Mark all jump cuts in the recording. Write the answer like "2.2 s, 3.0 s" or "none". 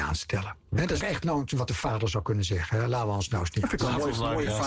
1.0 s